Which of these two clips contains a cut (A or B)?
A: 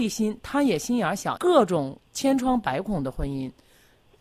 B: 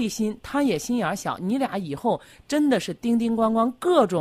A